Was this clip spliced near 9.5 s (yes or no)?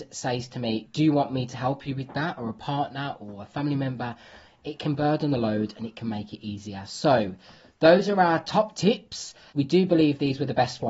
yes